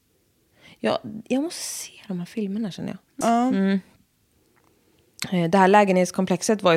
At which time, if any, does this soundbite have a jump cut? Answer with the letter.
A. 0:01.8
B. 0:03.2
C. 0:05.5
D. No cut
B